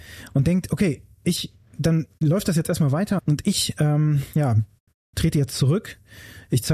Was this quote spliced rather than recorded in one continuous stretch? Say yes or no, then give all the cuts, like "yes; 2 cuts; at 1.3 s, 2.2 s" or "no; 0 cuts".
yes; 1 cut; at 3.2 s